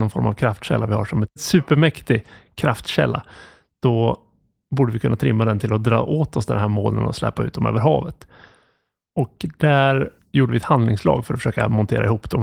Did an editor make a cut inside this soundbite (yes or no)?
no